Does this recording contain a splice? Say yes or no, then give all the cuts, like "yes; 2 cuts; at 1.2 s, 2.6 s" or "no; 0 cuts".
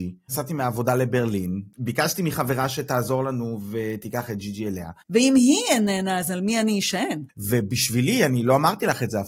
yes; 2 cuts; at 5.0 s, 7.3 s